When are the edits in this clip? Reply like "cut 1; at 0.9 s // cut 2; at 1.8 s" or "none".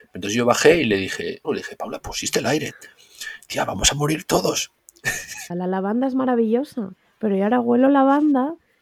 cut 1; at 1.4 s // cut 2; at 5.5 s

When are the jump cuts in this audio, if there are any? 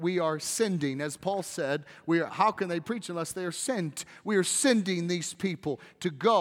cut 1; at 2.3 s

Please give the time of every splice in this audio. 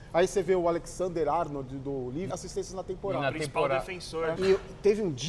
cut 1; at 2.3 s // cut 2; at 4.4 s

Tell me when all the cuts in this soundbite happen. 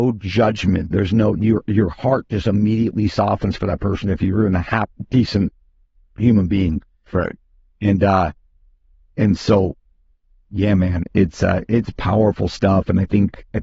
none

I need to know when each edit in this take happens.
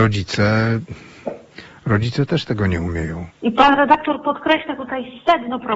cut 1; at 3.3 s

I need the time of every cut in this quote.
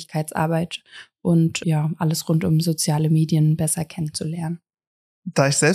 cut 1; at 1.6 s

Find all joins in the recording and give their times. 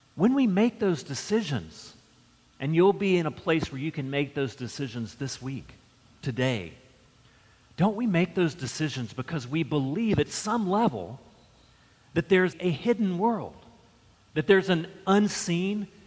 cut 1; at 12.5 s

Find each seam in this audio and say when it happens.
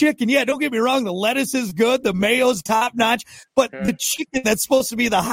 none

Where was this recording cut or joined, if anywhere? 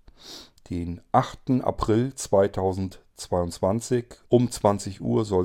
cut 1; at 4.2 s

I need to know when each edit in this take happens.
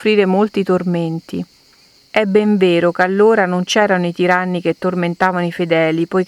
cut 1; at 2.0 s

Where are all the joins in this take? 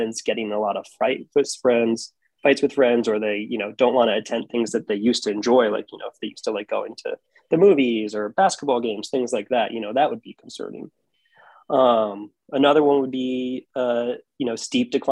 none

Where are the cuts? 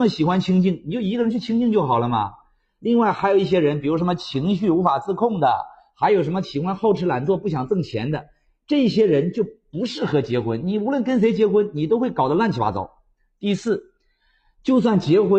none

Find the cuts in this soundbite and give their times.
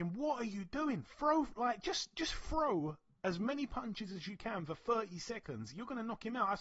none

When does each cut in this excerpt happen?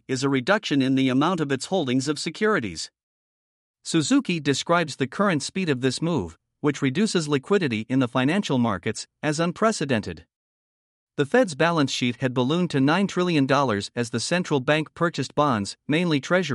none

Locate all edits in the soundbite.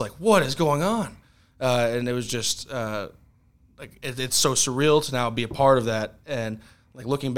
none

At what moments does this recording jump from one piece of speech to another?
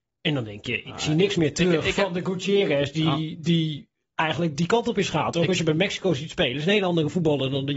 none

